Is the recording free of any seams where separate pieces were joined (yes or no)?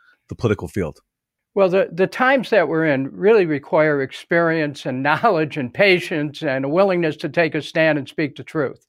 yes